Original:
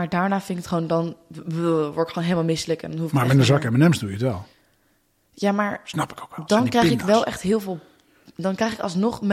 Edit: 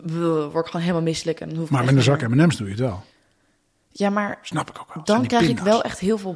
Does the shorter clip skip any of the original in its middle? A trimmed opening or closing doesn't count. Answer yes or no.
no